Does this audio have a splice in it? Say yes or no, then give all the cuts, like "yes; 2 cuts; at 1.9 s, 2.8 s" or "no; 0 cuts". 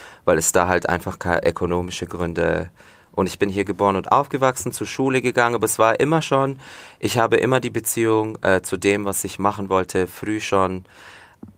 no; 0 cuts